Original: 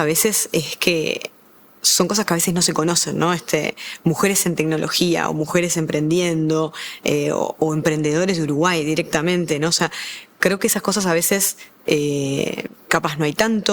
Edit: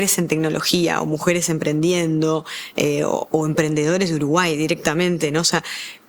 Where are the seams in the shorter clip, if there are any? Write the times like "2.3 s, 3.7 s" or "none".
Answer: none